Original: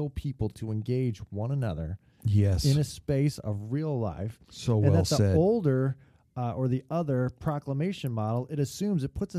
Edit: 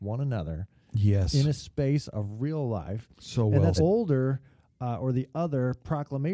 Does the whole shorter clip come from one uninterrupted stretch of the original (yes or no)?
no